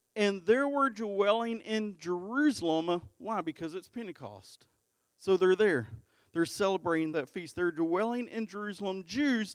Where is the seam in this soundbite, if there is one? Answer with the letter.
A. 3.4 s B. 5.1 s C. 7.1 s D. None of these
C